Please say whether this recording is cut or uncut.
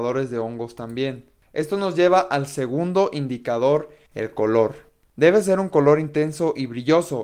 uncut